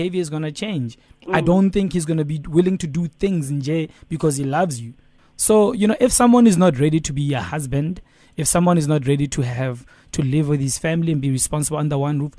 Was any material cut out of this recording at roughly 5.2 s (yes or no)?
yes